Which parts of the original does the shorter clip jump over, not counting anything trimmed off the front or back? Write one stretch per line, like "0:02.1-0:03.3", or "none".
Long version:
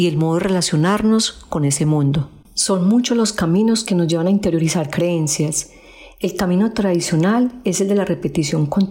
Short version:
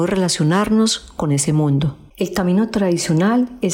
0:02.4-0:06.1